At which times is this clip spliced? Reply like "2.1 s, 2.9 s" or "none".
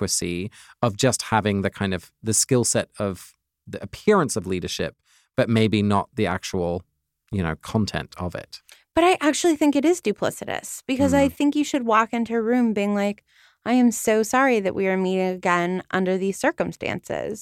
none